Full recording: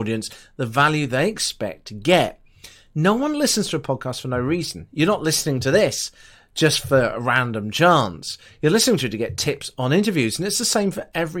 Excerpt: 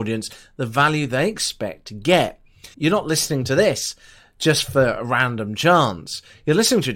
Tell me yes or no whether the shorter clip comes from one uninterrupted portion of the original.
no